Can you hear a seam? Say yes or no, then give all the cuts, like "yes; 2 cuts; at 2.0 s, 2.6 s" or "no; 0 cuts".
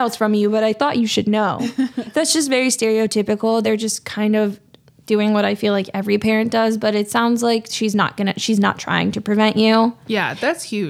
no; 0 cuts